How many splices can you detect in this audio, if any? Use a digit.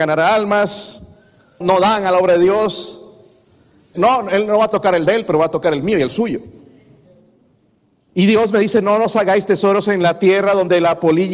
3